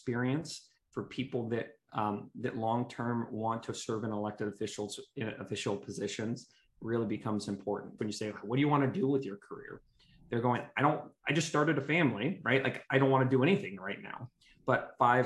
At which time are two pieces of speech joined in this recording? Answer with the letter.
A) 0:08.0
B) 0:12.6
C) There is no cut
A